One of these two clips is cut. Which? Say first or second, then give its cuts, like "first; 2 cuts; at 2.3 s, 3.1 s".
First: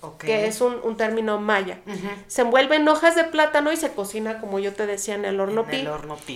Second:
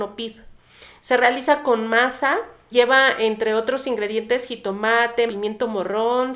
second; 2 cuts; at 2.7 s, 5.3 s